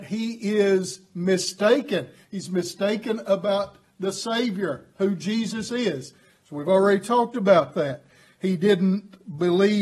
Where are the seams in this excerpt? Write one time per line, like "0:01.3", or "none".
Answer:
none